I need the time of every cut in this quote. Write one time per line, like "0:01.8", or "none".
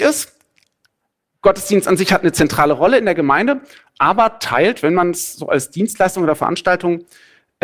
none